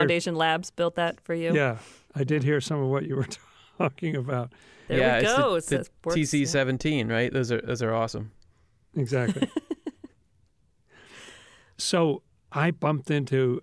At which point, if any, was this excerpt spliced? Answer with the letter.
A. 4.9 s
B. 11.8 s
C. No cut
A